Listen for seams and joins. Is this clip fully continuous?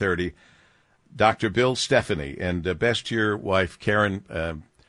yes; 0 cuts

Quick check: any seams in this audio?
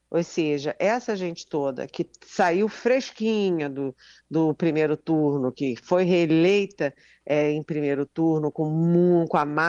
no; 0 cuts

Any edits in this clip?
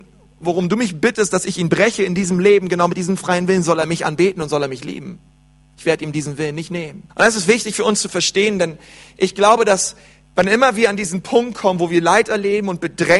yes; 1 cut; at 7.1 s

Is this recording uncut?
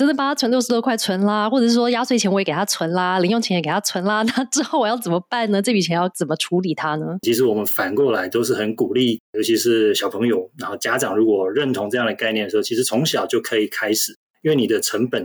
no; 1 cut; at 7.2 s

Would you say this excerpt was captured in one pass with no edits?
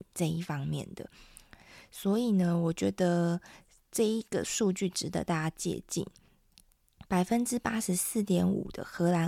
no; 1 cut; at 7.0 s

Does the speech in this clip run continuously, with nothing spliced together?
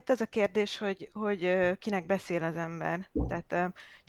yes; 0 cuts

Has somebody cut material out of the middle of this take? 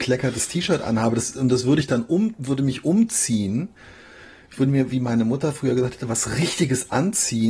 no; 0 cuts

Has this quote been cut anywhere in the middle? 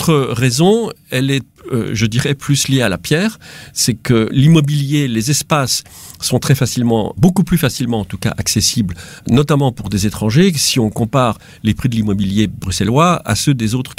no; 0 cuts

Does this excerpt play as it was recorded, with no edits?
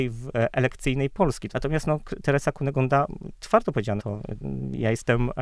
no; 2 cuts; at 1.5 s, 4.0 s

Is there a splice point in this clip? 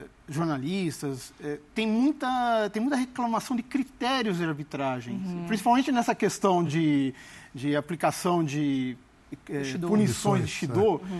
no; 0 cuts

